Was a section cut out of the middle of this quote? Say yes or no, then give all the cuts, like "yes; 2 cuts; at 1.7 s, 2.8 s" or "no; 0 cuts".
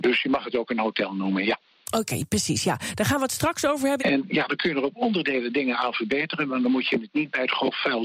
yes; 1 cut; at 4.0 s